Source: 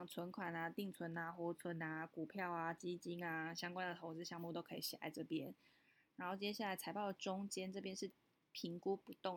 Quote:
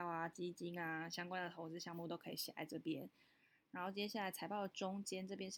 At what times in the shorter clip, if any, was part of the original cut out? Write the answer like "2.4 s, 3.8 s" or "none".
none